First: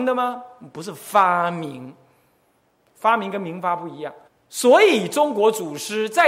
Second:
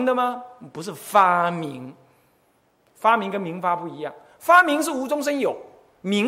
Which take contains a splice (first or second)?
first